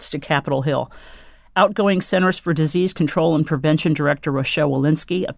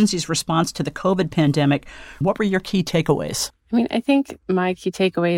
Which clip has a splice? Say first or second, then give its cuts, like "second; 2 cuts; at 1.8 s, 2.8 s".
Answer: second; 1 cut; at 2.2 s